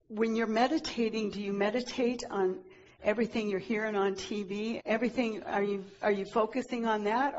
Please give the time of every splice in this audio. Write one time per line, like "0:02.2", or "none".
0:04.8